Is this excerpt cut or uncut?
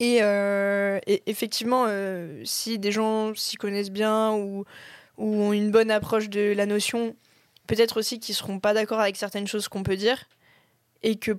uncut